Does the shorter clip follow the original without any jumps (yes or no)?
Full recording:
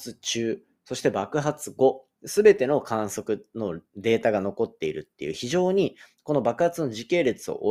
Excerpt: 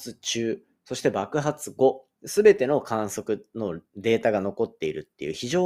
yes